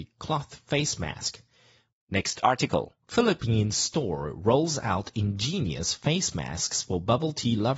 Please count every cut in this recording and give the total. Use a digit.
2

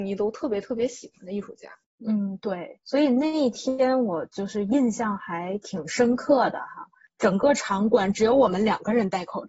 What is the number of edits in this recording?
0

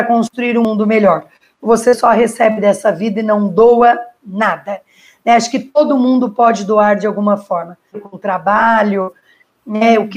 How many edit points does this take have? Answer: 1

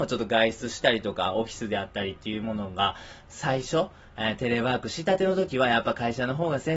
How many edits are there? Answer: 1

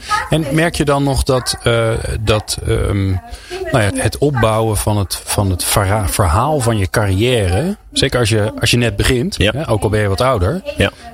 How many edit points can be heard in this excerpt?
1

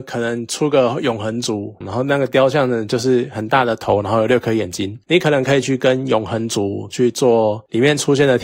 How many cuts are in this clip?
1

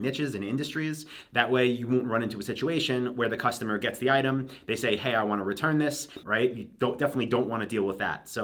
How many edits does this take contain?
2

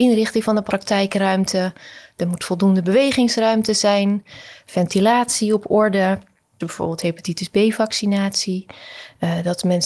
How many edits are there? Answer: 1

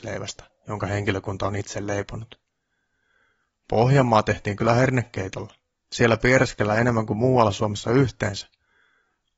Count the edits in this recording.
0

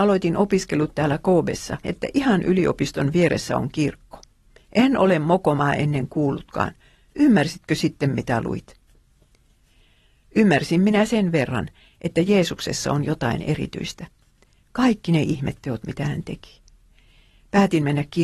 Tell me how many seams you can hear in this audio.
2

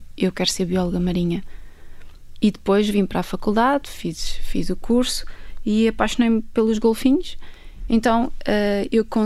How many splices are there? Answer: 1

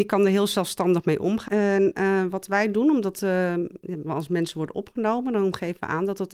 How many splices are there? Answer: 1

